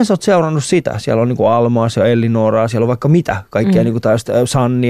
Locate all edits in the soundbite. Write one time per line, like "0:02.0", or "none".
0:02.7